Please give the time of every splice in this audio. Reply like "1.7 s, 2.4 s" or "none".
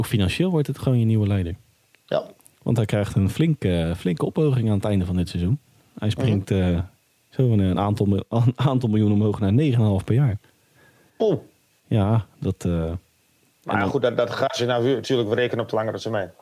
none